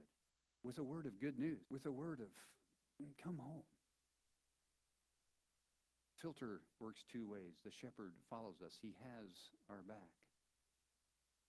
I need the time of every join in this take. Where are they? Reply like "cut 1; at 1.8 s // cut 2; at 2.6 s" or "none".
cut 1; at 1.6 s